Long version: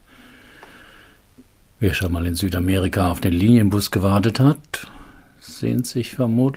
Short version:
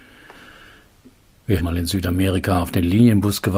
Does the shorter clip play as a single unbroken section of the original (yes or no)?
no